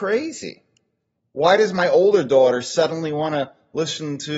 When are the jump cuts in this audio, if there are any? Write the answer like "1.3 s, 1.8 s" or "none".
1.2 s

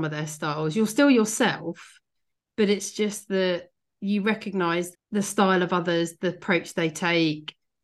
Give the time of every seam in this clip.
4.9 s

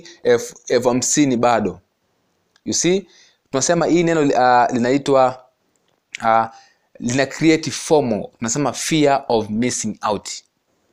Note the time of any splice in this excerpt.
none

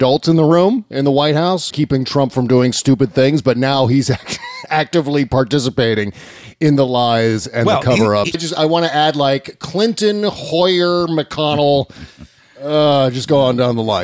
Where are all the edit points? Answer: 1.7 s, 8.3 s

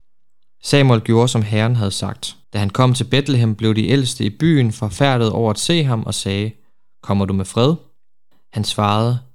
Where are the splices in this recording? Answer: 2.4 s

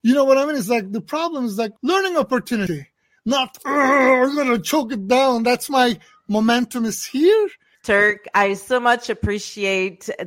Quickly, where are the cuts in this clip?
1.8 s, 7.7 s

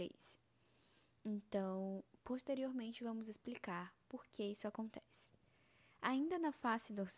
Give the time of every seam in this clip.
none

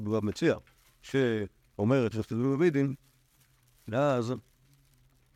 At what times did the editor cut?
2.1 s

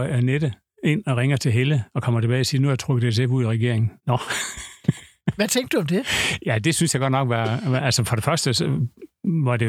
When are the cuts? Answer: 4.0 s

